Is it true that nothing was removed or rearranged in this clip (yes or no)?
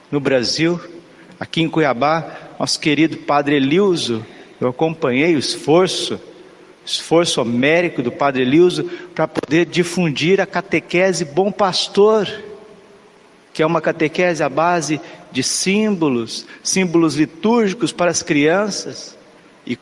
yes